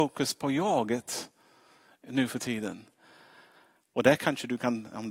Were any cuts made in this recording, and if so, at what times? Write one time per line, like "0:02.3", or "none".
0:03.9